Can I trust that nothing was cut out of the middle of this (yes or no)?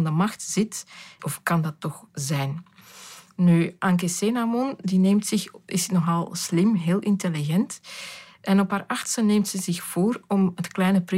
no